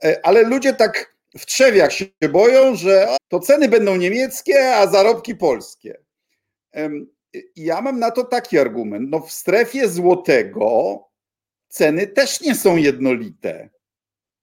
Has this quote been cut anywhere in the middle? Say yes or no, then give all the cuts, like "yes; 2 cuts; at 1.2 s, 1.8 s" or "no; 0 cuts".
yes; 1 cut; at 3.2 s